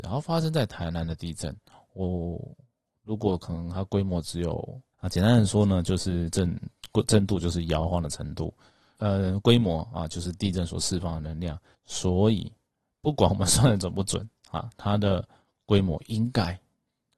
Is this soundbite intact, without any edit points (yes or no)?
no